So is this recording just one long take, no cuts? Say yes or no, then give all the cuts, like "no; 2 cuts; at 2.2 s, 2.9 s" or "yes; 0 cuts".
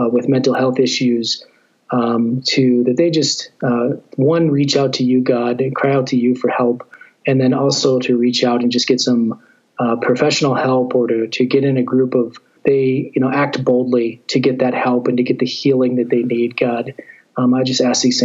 no; 1 cut; at 12.6 s